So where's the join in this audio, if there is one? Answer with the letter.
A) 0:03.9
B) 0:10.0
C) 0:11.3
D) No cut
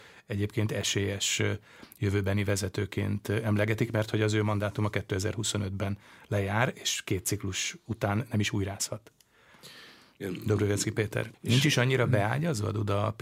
C